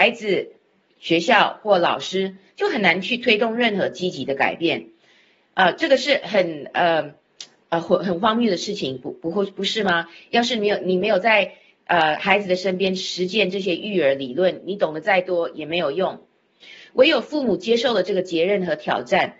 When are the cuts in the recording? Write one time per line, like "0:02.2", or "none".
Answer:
none